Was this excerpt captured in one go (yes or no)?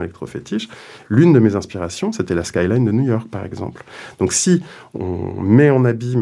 yes